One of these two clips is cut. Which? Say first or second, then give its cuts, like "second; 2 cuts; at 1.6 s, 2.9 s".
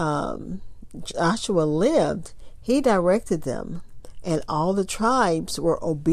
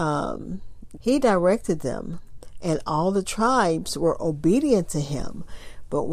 second; 1 cut; at 1.0 s